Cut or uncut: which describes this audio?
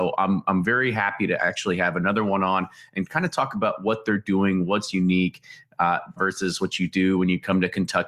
cut